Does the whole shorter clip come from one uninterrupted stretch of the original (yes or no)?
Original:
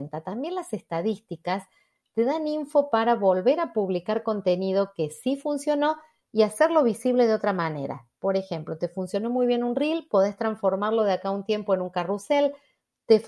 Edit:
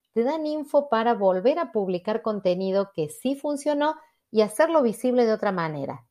yes